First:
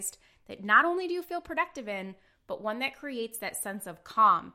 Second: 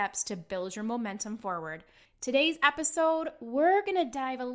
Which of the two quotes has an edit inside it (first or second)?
second